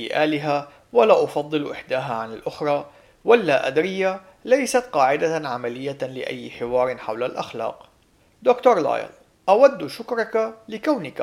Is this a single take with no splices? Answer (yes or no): yes